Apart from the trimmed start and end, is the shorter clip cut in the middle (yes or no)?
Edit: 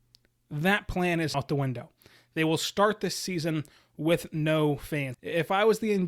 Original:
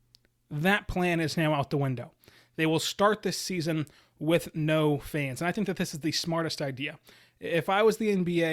yes